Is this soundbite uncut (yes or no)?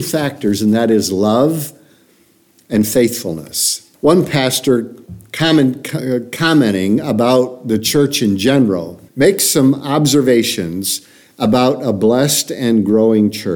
no